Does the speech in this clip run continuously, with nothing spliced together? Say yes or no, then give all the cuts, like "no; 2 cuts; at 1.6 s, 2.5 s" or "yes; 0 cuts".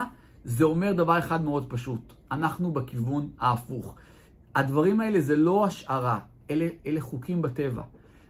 yes; 0 cuts